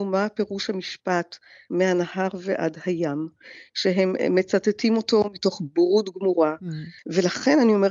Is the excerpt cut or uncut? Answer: cut